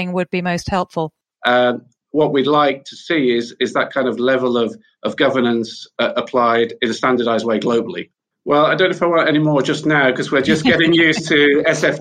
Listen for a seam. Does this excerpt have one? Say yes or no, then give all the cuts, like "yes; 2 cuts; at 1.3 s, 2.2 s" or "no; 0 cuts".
yes; 2 cuts; at 1.4 s, 8.3 s